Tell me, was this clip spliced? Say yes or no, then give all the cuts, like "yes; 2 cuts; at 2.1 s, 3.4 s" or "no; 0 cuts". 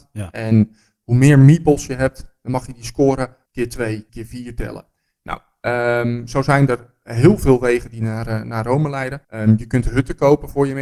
yes; 2 cuts; at 4.1 s, 9.2 s